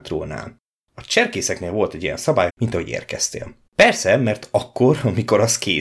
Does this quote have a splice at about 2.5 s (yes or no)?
yes